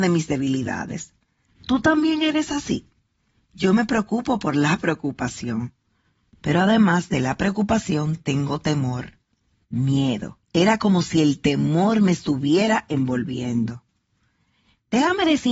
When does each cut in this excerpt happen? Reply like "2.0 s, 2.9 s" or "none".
10.4 s

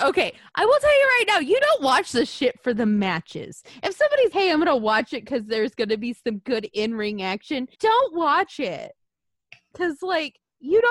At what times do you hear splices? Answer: 4.3 s, 7.7 s

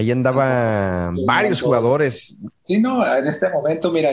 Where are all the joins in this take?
2.5 s

